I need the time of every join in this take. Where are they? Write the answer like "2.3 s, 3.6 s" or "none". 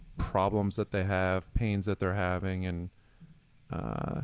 none